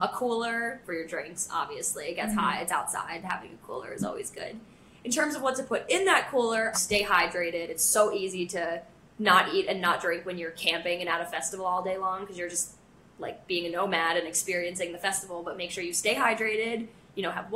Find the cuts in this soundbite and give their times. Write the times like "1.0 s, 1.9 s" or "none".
6.7 s